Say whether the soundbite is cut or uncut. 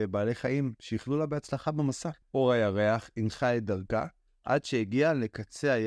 cut